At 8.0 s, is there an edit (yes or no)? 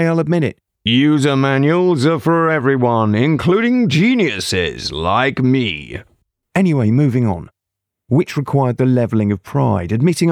yes